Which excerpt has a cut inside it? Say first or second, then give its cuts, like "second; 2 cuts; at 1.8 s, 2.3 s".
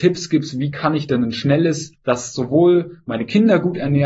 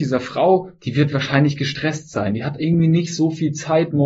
first; 1 cut; at 1.9 s